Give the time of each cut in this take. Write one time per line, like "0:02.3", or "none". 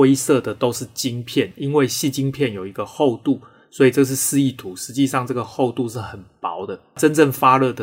none